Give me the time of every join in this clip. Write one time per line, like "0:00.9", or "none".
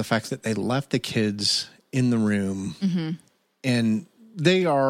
none